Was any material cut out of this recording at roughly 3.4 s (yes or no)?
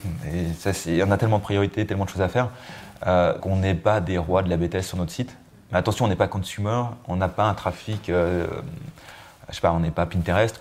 yes